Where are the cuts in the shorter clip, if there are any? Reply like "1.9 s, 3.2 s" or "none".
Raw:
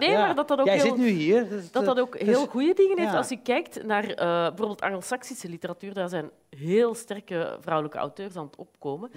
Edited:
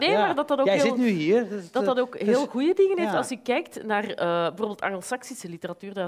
none